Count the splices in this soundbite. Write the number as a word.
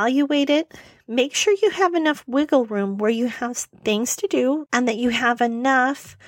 one